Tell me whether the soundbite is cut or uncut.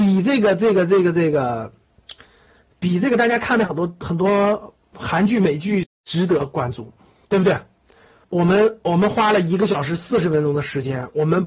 cut